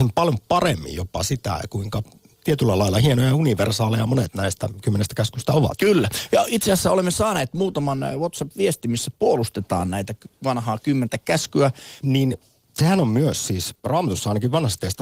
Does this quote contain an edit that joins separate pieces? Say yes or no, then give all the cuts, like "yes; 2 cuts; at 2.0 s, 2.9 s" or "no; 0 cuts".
yes; 2 cuts; at 12.0 s, 13.8 s